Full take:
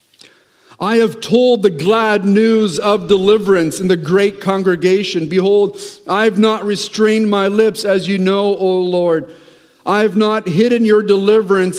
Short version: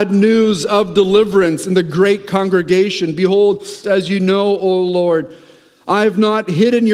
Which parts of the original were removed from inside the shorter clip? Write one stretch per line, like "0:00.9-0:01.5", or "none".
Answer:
0:06.0-0:07.8